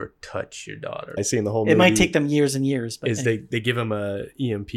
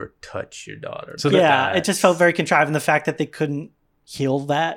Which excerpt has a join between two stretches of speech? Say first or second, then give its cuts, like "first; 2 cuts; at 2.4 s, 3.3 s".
first; 1 cut; at 1.2 s